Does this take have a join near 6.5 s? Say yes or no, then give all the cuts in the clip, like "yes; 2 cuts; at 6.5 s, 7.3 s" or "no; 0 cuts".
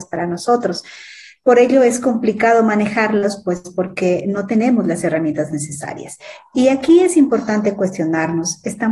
no; 0 cuts